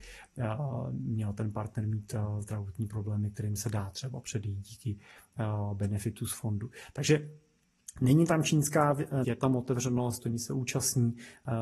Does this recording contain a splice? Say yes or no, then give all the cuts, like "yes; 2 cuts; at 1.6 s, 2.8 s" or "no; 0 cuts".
yes; 1 cut; at 9.2 s